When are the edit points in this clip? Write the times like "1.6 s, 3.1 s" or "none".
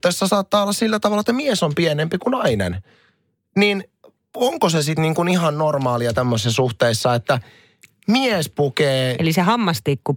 none